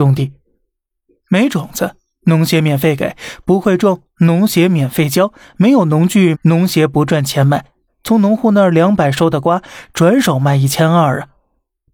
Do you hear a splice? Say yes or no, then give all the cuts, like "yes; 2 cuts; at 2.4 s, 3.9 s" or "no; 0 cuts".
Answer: yes; 2 cuts; at 6.3 s, 7.9 s